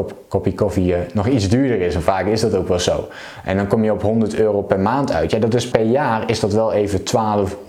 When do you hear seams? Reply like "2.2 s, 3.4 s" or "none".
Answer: 5.7 s